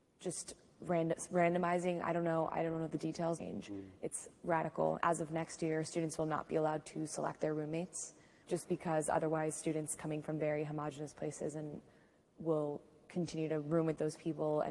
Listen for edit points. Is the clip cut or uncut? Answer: cut